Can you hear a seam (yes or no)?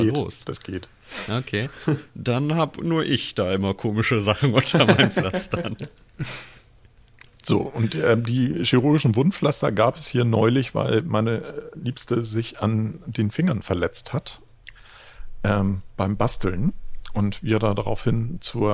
no